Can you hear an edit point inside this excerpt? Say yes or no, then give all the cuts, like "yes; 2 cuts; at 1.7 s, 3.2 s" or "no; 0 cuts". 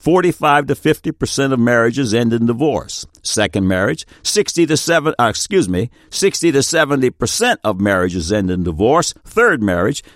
no; 0 cuts